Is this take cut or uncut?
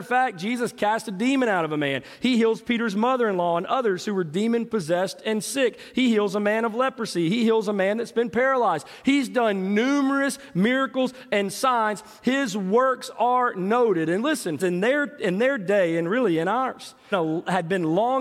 cut